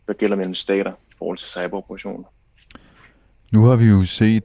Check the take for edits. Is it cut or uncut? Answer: uncut